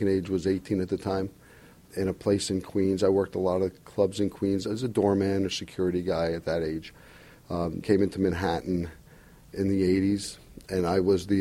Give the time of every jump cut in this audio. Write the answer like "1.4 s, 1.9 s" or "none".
7.8 s